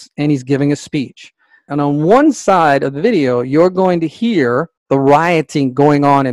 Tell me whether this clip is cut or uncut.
cut